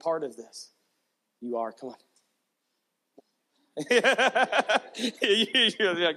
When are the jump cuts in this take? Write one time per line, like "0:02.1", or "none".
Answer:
0:01.3
0:03.2